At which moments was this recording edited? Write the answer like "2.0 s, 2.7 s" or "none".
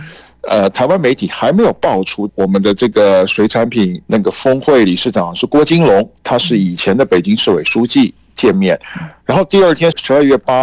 4.0 s